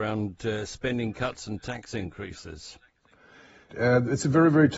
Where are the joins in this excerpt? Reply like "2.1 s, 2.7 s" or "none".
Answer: 3.7 s